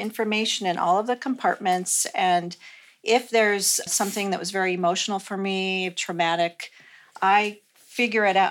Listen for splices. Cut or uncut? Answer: cut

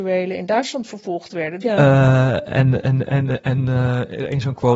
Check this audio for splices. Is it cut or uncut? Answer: cut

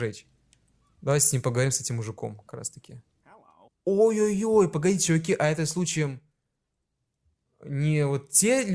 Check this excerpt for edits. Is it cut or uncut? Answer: cut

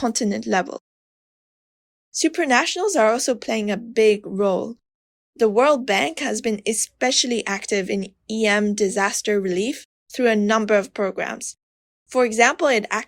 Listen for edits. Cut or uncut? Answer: uncut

